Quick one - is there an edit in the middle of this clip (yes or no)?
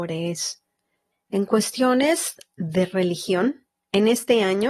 yes